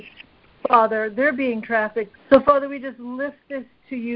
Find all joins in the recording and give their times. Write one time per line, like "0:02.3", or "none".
0:02.1